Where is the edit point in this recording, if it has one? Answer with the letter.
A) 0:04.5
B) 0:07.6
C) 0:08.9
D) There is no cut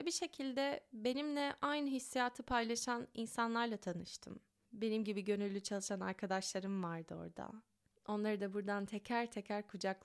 D